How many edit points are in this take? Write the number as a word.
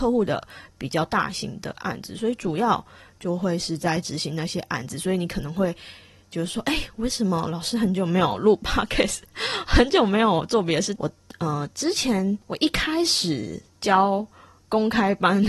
two